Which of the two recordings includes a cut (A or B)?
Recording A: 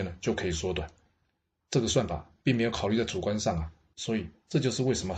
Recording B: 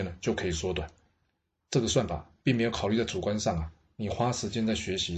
A